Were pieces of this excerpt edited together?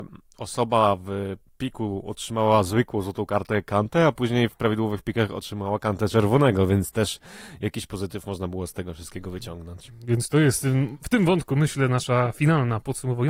no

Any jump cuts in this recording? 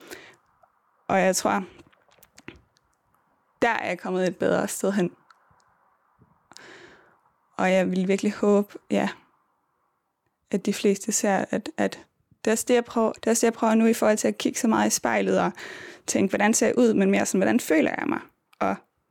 yes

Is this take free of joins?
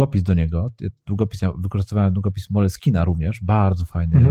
yes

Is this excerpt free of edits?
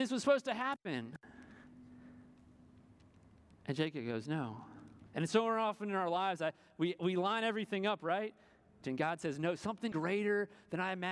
no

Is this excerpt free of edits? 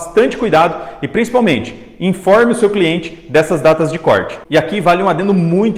no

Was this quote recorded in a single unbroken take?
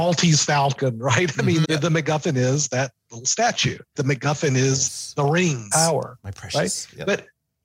no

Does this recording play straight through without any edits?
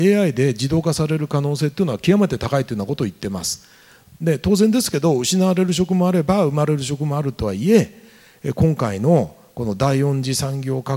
yes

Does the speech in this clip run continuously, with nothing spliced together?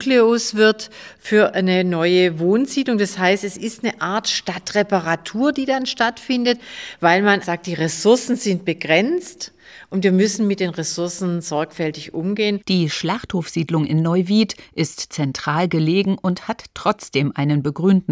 no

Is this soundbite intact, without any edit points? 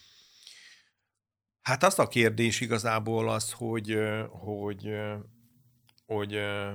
yes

